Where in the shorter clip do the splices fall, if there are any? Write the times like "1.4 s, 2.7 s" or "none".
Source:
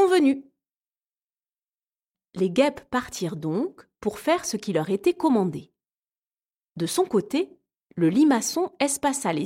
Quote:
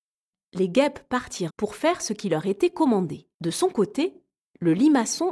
1.5 s, 3.3 s